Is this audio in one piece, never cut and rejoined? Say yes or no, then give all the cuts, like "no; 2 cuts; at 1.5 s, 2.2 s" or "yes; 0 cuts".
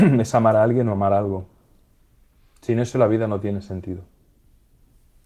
yes; 0 cuts